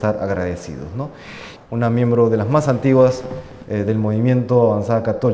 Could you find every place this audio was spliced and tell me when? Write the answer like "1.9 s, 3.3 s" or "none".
1.6 s

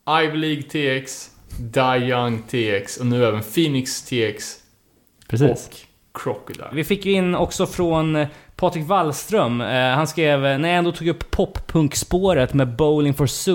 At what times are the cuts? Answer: 6.7 s

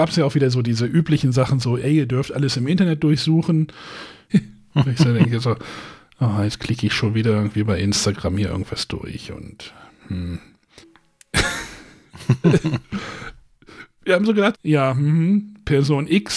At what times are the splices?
4.3 s, 10.8 s, 14.5 s

